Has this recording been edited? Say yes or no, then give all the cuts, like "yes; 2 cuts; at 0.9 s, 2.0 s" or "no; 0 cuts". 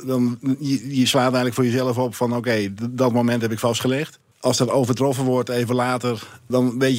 no; 0 cuts